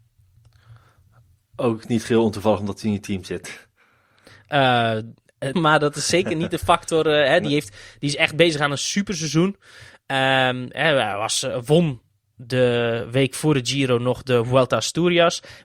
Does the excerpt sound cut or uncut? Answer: cut